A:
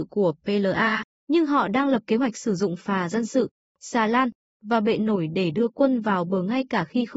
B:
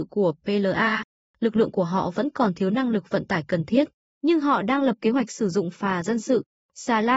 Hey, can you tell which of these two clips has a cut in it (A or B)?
A